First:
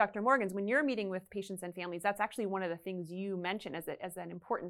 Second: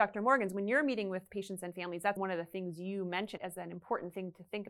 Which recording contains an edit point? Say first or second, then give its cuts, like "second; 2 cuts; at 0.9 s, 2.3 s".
second; 2 cuts; at 2.2 s, 3.4 s